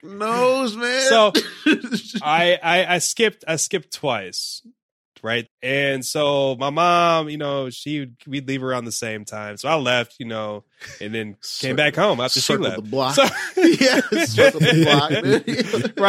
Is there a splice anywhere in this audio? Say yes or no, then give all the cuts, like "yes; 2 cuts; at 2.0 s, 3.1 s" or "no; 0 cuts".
yes; 1 cut; at 5.5 s